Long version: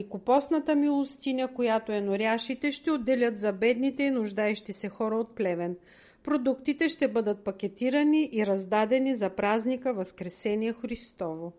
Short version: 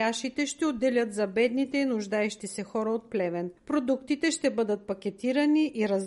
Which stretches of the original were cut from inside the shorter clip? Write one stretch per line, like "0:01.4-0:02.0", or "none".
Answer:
0:05.8-0:06.1